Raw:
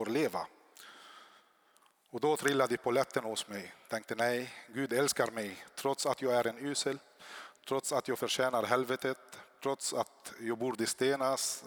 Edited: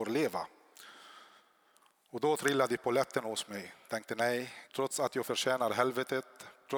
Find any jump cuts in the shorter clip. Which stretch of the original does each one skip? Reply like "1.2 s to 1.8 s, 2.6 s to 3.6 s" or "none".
4.6 s to 7.6 s